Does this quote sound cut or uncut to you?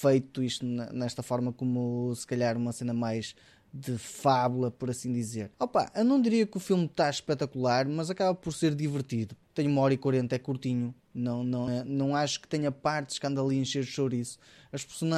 cut